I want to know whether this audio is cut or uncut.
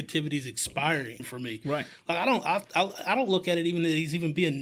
cut